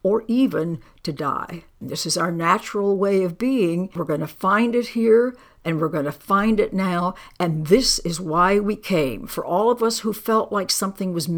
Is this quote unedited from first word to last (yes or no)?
no